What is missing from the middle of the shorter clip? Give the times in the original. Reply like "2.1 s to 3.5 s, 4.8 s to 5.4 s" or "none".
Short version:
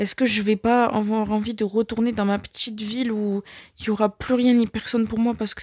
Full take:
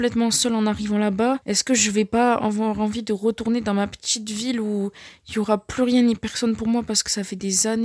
none